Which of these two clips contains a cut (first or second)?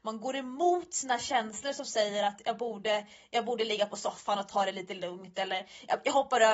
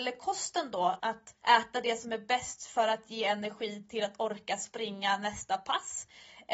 second